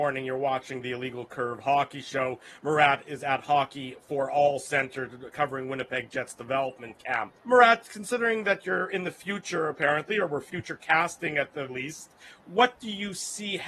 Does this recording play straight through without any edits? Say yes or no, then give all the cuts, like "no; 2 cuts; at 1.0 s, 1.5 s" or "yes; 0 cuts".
no; 2 cuts; at 7.4 s, 11.7 s